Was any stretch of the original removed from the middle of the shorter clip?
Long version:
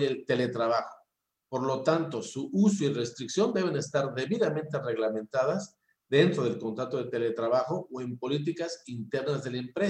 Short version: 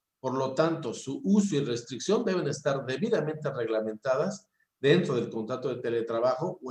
no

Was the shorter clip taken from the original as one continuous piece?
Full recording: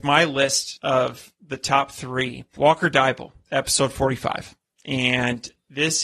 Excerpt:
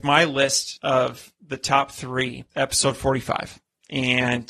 no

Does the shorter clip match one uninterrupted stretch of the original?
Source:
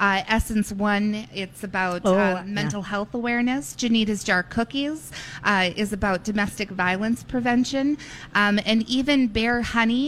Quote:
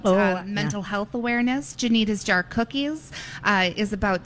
yes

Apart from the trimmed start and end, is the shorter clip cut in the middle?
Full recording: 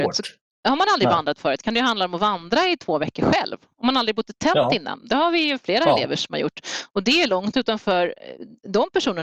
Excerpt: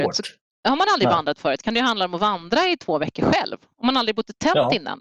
no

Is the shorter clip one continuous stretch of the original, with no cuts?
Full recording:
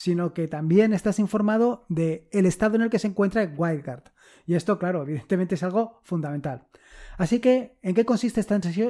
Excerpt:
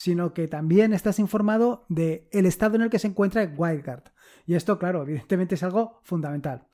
yes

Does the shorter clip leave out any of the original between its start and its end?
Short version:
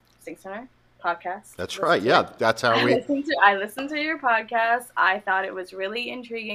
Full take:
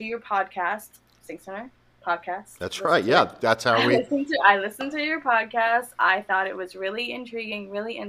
no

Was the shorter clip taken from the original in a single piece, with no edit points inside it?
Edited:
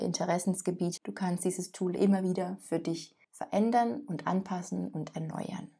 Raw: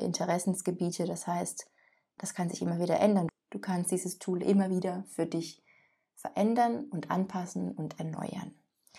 no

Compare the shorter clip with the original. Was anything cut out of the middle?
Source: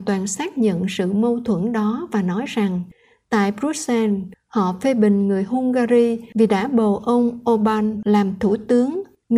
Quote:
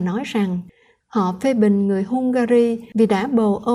yes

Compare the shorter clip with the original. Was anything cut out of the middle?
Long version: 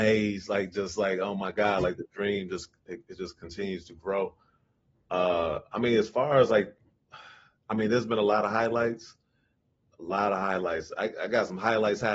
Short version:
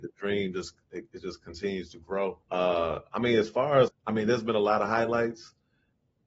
yes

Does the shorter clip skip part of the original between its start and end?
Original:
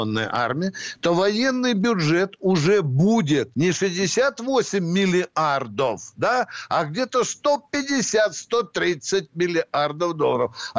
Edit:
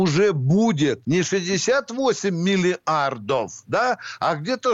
no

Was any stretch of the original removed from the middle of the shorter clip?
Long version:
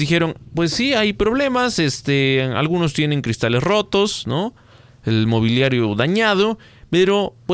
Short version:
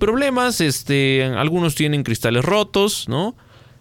no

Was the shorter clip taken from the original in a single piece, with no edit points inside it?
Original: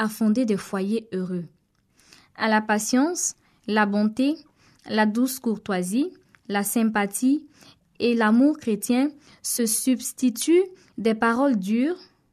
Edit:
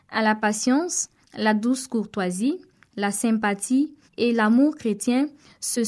no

